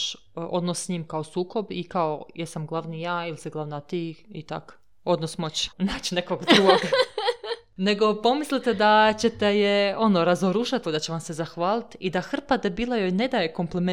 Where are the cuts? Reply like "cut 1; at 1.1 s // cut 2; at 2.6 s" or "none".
cut 1; at 5.7 s // cut 2; at 10.8 s

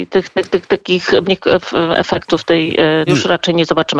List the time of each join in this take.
cut 1; at 1.2 s // cut 2; at 3.1 s

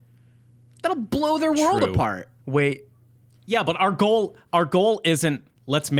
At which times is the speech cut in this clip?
cut 1; at 2.4 s

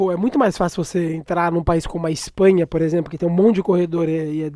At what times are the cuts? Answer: none

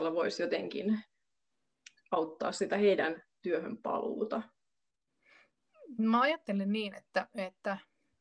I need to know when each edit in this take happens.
none

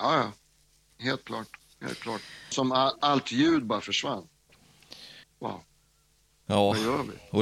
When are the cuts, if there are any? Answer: cut 1; at 2.5 s // cut 2; at 5.2 s

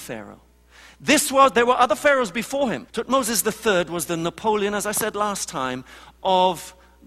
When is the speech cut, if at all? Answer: cut 1; at 2.9 s

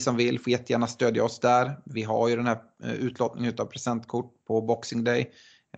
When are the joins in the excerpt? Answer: none

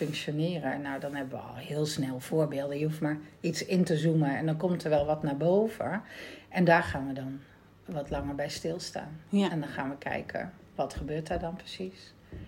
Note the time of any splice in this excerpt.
none

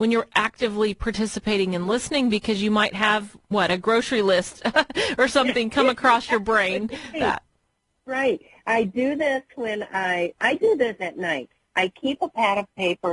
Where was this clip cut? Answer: cut 1; at 7.1 s // cut 2; at 11.0 s

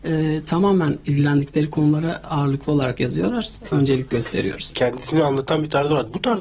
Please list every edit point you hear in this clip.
cut 1; at 3.7 s // cut 2; at 4.7 s

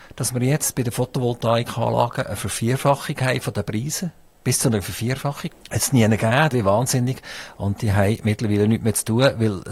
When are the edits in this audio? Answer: cut 1; at 5.5 s // cut 2; at 6.5 s

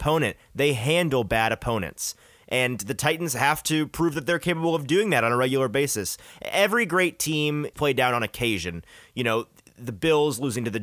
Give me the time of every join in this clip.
cut 1; at 7.7 s

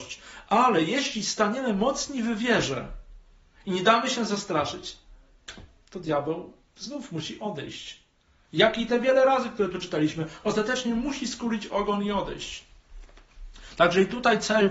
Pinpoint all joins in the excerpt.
none

